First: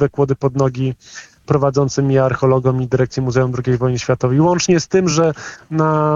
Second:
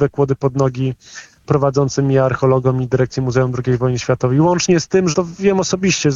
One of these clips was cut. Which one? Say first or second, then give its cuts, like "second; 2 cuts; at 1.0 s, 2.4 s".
second; 1 cut; at 5.1 s